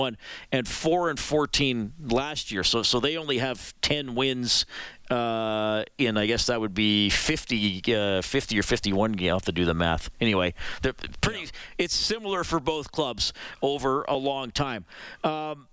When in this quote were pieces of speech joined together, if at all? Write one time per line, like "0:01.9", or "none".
none